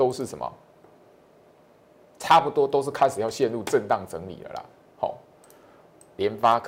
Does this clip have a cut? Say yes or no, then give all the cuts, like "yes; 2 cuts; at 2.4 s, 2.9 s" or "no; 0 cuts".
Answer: no; 0 cuts